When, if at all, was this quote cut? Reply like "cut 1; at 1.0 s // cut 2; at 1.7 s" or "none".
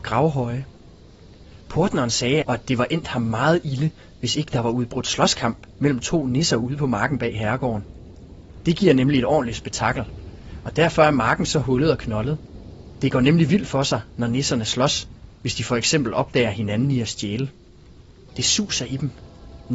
cut 1; at 2.4 s // cut 2; at 18.3 s